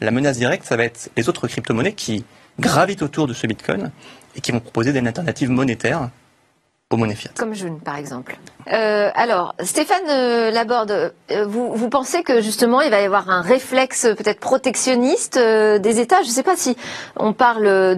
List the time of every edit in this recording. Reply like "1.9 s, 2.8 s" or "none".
8.6 s